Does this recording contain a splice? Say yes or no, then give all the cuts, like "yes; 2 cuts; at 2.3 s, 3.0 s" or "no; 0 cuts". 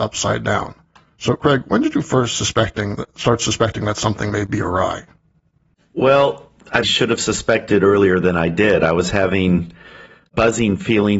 yes; 1 cut; at 6.8 s